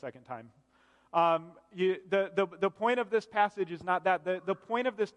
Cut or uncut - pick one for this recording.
uncut